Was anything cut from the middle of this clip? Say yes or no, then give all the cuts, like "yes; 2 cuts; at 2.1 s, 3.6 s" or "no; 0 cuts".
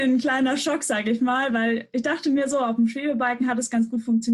no; 0 cuts